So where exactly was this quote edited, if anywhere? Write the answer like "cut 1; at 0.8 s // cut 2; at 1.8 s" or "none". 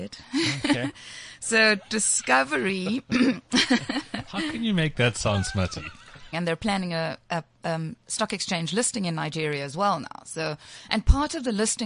cut 1; at 6.3 s

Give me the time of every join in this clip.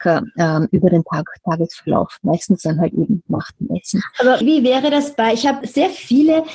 cut 1; at 4.4 s // cut 2; at 5.6 s

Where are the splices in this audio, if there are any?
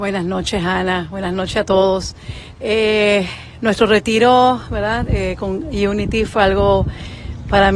none

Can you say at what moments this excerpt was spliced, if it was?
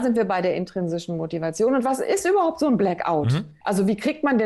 none

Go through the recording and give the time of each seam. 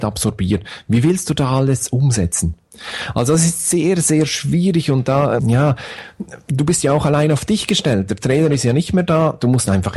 cut 1; at 5.4 s

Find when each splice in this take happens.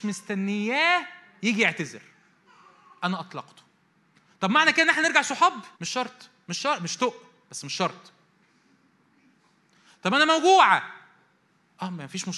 cut 1; at 5.7 s

